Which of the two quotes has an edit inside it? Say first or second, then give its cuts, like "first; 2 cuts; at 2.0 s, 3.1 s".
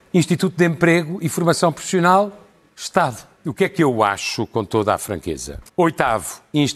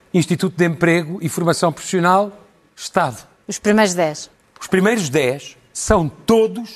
first; 2 cuts; at 3.4 s, 5.7 s